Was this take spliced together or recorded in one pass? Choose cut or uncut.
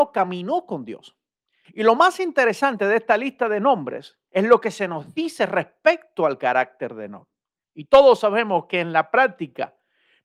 cut